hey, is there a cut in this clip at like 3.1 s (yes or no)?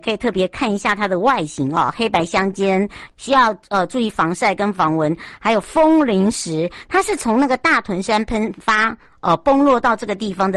yes